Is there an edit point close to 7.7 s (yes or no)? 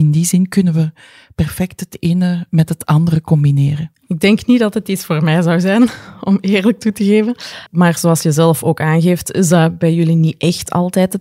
yes